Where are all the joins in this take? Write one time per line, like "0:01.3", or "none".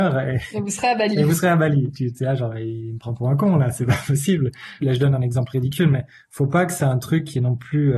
0:04.8